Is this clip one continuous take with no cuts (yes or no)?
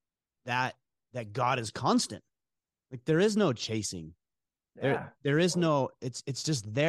yes